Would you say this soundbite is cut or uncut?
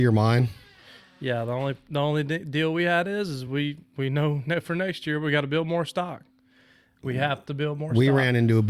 uncut